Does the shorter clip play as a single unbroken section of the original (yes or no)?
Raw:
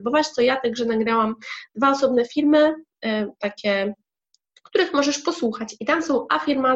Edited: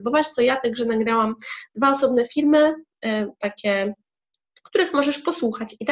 yes